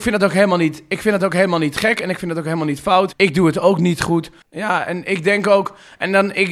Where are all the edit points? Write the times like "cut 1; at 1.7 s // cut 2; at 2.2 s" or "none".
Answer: cut 1; at 3.1 s // cut 2; at 4.4 s